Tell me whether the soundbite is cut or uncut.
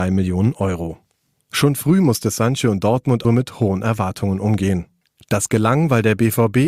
cut